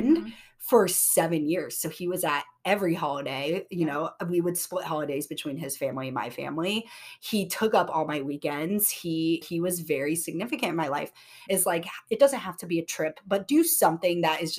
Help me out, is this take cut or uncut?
cut